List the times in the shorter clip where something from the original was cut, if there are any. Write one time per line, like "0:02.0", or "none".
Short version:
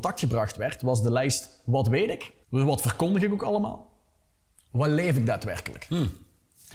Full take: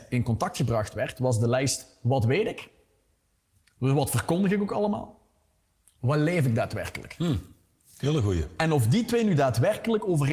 0:02.4

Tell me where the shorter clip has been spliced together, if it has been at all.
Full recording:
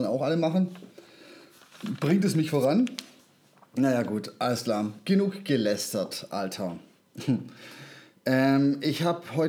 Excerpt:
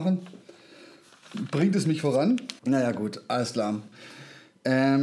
0:02.6
0:03.9

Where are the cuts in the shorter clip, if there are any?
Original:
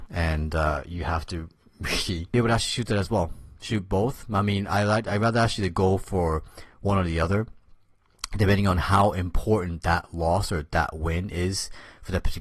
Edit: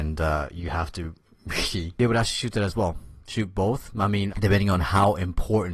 0:04.3

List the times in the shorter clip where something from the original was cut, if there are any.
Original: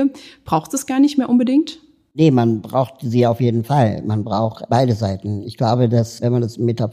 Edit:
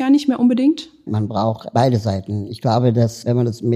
0:01.1

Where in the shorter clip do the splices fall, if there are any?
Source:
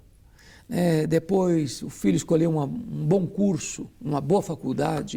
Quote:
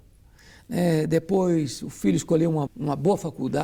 0:02.7

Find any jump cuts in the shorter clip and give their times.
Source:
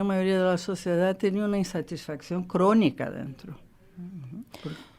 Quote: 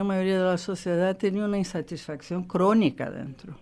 none

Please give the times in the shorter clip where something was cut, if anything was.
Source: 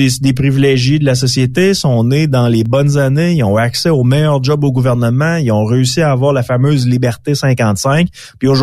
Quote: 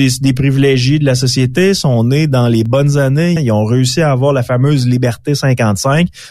0:03.4

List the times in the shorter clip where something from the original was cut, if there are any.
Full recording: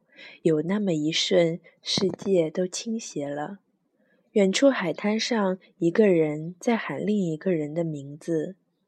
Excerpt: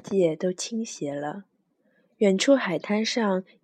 none

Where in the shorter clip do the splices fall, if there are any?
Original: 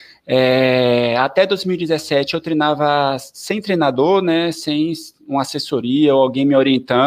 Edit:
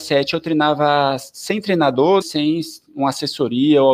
0:02.2

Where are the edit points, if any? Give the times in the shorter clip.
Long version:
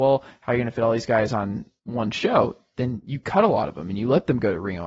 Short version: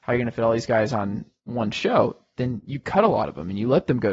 none

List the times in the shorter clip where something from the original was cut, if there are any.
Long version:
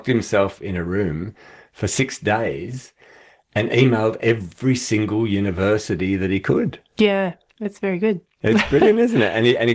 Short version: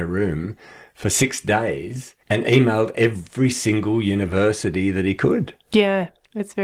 0:02.2

